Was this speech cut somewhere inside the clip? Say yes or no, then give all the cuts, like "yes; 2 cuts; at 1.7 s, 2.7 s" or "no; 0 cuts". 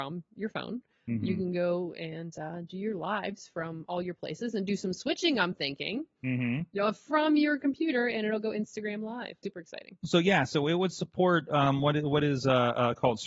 yes; 1 cut; at 9.4 s